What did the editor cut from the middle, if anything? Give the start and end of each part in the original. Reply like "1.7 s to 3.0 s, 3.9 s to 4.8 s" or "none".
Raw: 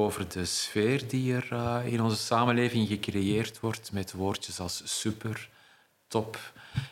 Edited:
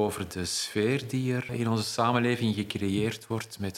1.5 s to 1.8 s